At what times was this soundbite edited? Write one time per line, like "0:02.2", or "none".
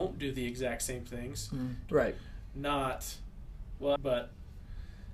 0:01.9
0:04.0